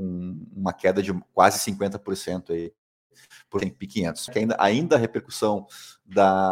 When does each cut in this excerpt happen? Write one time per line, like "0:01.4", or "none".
0:04.3